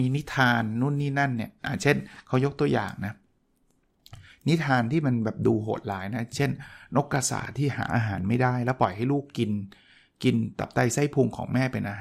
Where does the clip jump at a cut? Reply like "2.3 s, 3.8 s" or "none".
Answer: none